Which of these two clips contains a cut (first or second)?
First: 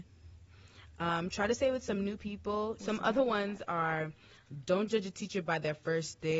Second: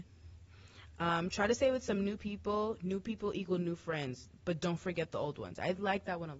first